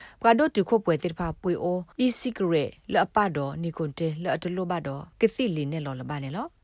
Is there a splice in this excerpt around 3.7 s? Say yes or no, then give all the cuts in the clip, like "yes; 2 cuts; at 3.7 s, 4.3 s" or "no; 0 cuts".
no; 2 cuts; at 1.9 s, 5.1 s